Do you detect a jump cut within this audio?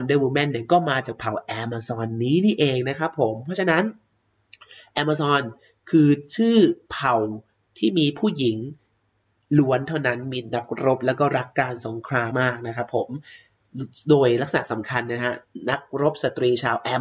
yes; 1 cut; at 12.3 s

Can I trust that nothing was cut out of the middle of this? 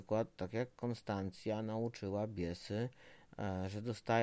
yes; 0 cuts

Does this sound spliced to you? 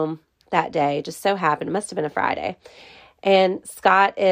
no; 0 cuts

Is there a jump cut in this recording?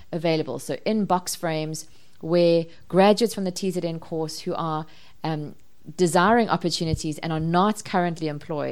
no; 0 cuts

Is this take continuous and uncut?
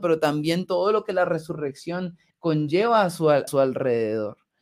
no; 2 cuts; at 2.3 s, 3.5 s

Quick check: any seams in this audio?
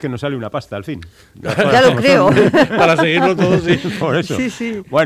no; 0 cuts

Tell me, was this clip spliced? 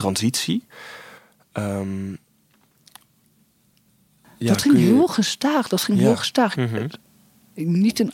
yes; 1 cut; at 6.5 s

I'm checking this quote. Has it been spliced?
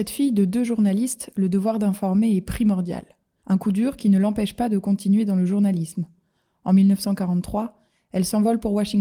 yes; 1 cut; at 3.4 s

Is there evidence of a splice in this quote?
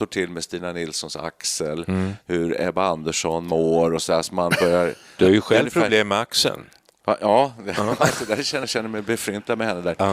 yes; 1 cut; at 8.6 s

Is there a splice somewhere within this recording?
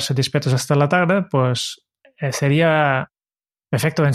no; 0 cuts

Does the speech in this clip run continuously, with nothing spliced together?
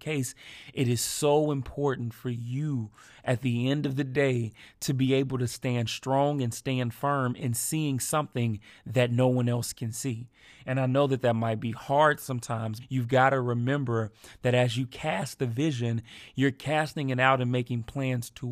no; 1 cut; at 12.8 s

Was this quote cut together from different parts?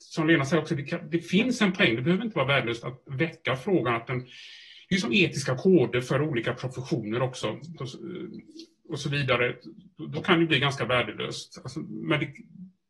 yes; 1 cut; at 7.8 s

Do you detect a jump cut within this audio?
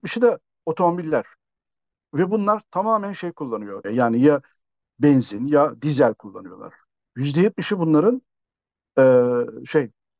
yes; 1 cut; at 3.8 s

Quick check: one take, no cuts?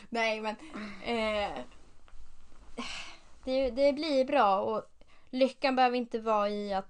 yes; 0 cuts

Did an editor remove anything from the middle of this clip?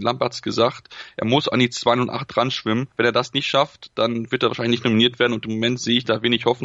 yes; 1 cut; at 2.9 s

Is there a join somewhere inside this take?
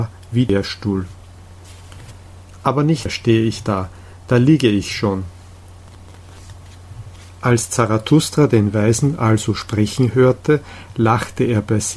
no; 0 cuts

